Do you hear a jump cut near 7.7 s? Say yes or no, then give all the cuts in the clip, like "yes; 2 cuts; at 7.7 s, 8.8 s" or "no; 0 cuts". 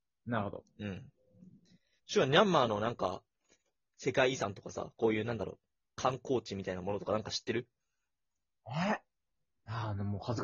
no; 1 cut; at 2.0 s